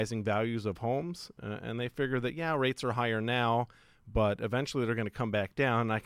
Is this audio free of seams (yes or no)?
yes